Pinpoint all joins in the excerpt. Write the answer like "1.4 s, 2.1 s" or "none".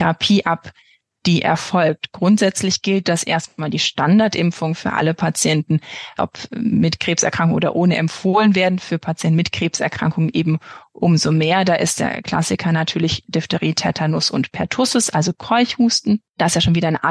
6.2 s